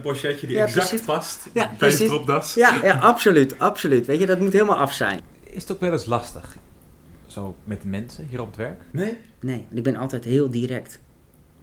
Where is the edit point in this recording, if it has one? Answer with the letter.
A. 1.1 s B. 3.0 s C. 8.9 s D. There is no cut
C